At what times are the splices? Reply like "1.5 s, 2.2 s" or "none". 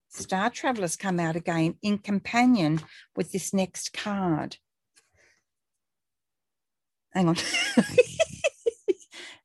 none